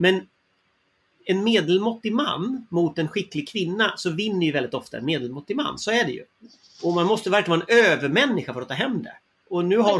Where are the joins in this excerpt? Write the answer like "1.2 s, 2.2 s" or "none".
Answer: none

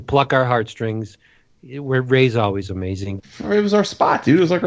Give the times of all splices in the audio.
3.2 s

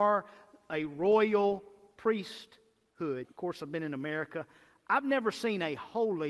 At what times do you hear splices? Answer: 3.2 s

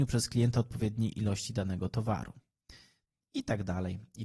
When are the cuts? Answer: none

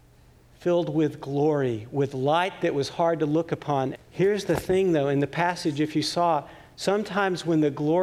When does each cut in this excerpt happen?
3.9 s

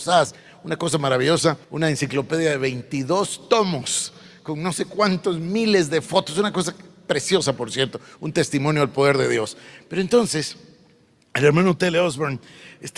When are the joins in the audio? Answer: 1.6 s

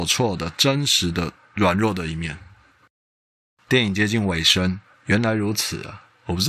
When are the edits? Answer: none

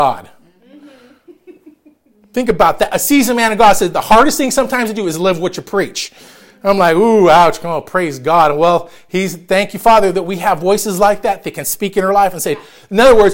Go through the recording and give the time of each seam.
none

